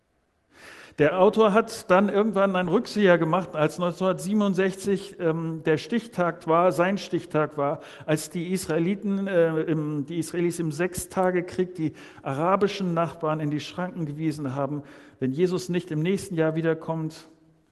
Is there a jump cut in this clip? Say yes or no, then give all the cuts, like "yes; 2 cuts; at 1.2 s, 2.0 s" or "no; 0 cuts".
no; 0 cuts